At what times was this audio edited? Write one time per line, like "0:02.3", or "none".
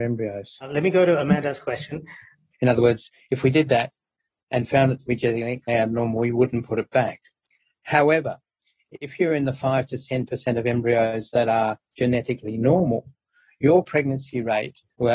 0:02.5